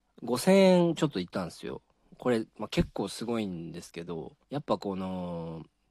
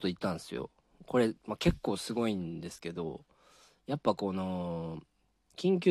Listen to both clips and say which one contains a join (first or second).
first